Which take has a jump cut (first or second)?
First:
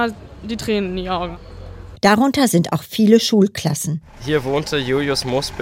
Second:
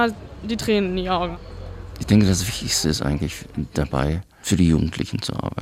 first